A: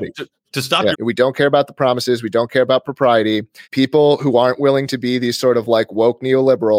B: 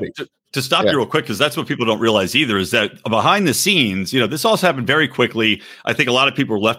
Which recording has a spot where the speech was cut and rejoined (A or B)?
A